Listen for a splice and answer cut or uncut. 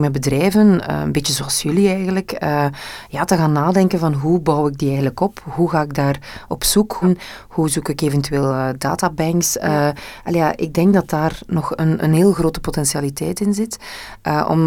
cut